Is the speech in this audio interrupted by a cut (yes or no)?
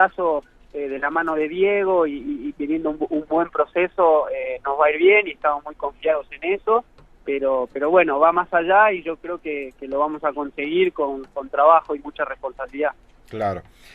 no